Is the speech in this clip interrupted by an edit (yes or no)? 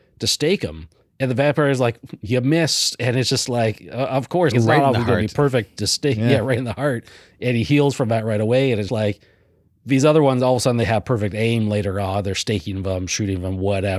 yes